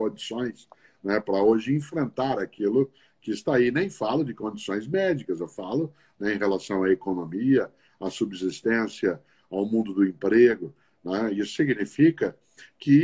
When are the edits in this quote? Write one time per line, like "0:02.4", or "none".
none